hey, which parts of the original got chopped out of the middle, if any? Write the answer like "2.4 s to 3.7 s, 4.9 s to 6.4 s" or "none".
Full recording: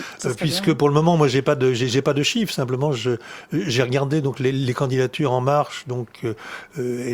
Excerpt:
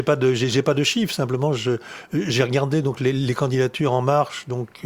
none